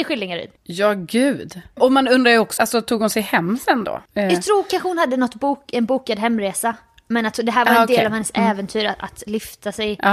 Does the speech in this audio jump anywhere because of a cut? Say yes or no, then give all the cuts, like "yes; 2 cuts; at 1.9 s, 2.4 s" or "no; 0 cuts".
yes; 2 cuts; at 2.6 s, 4.1 s